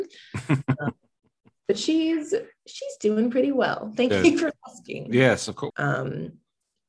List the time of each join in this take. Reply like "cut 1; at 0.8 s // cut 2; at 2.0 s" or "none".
cut 1; at 5.7 s